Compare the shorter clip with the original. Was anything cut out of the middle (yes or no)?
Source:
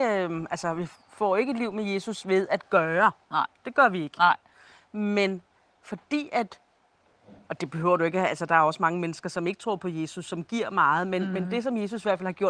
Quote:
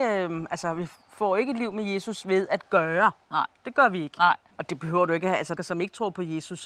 yes